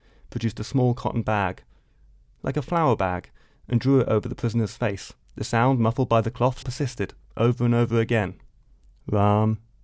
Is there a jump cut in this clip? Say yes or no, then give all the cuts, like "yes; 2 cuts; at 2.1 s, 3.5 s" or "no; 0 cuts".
yes; 2 cuts; at 5.2 s, 6.6 s